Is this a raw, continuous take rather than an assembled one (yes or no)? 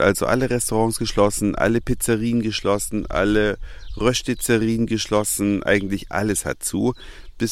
yes